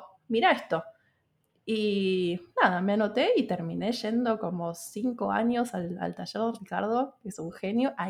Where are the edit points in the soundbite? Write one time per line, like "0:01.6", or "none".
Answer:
none